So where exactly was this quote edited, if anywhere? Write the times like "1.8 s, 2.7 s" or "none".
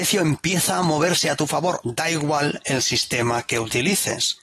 1.8 s